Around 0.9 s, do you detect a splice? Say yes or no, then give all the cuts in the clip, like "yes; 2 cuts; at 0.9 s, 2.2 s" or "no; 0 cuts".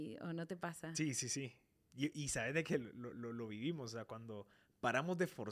no; 0 cuts